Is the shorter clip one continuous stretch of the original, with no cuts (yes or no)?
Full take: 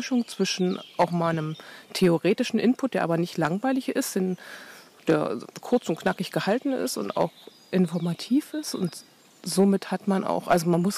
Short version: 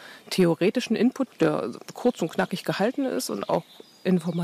no